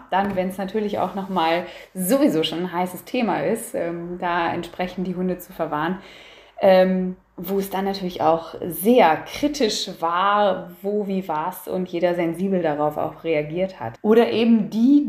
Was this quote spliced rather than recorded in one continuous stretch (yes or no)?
yes